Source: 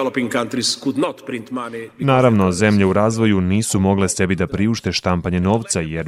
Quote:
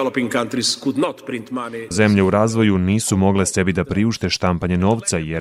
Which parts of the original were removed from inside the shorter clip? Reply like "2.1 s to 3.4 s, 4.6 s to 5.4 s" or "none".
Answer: 1.9 s to 2.5 s